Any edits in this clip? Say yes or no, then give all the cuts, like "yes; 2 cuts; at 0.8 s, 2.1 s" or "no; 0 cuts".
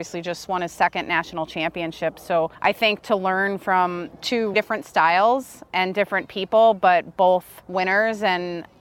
yes; 1 cut; at 4.5 s